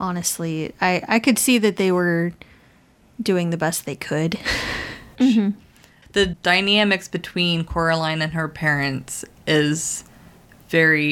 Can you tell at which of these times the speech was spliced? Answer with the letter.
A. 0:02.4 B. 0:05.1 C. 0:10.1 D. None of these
B